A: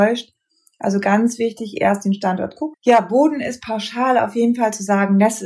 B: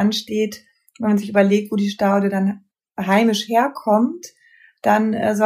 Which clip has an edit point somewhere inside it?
A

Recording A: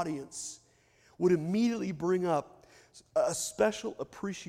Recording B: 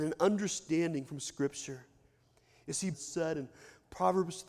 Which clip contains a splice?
B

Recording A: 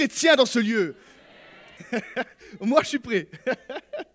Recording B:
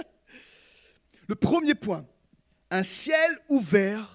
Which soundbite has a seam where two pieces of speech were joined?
A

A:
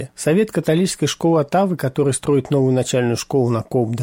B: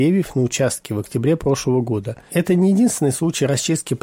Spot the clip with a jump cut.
B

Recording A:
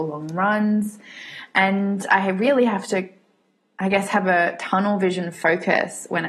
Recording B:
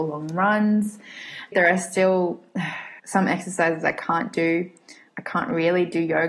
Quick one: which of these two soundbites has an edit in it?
B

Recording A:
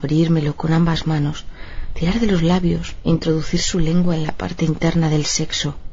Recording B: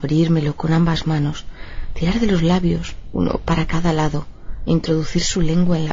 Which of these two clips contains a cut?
A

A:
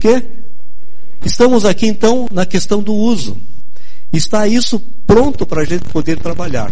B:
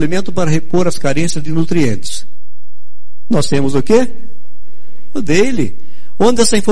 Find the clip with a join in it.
A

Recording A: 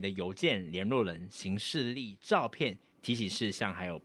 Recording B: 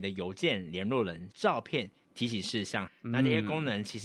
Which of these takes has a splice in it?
B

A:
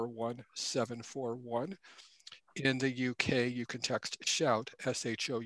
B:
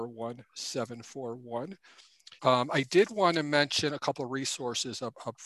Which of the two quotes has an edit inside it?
B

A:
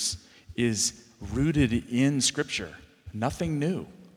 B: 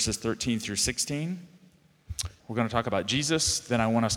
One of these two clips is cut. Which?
B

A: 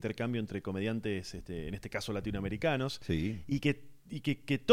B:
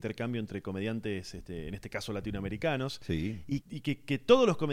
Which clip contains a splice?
B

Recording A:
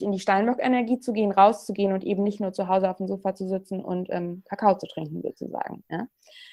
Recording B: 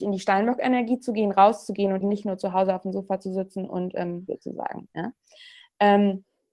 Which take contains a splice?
B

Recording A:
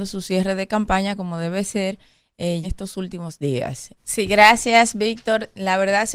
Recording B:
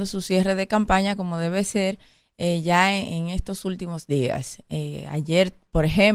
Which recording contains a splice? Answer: A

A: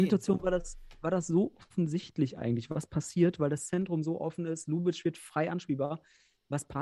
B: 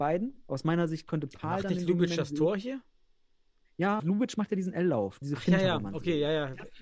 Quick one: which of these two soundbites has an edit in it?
B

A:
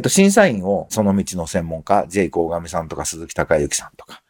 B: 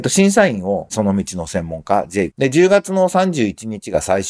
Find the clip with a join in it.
B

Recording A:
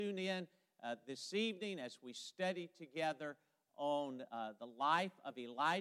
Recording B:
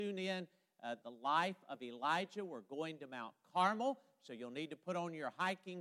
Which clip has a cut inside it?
B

